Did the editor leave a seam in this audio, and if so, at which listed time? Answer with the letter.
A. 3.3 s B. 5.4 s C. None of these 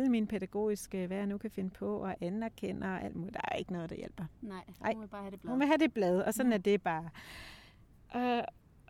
C